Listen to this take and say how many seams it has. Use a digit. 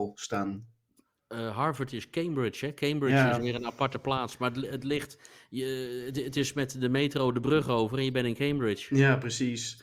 0